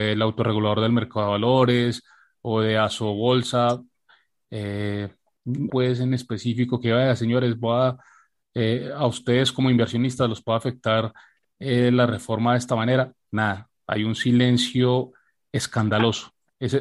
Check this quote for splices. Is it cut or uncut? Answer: cut